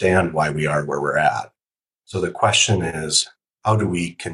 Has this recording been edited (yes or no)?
no